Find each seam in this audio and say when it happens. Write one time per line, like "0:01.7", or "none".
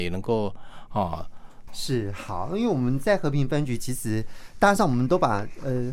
0:01.7